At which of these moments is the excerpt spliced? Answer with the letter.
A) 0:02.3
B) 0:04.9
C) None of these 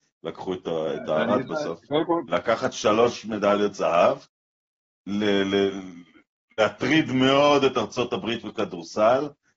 A